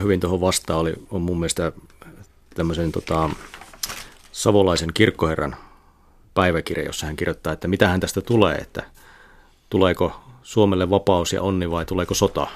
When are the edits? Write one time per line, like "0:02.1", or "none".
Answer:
none